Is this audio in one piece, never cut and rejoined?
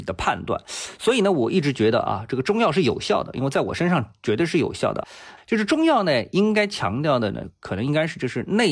no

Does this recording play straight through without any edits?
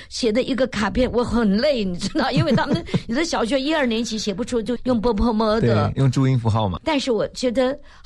no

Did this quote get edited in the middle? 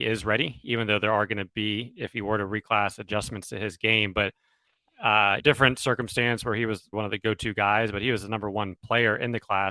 yes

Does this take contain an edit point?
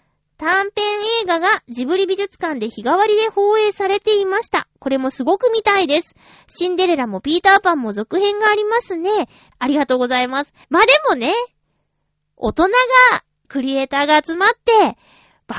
yes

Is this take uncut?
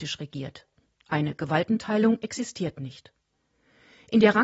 yes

